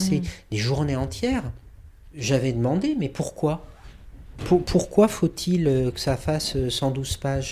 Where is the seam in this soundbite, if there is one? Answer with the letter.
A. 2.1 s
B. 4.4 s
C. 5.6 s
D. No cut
B